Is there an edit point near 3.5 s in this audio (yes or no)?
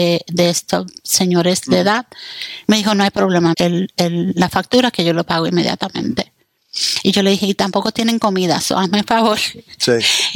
yes